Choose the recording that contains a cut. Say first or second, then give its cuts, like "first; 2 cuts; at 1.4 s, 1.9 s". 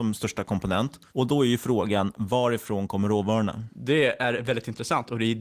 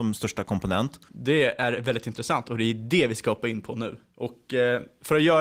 second; 1 cut; at 1.1 s